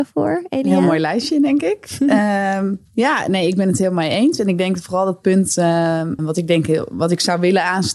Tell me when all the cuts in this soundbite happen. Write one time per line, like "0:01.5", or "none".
0:06.2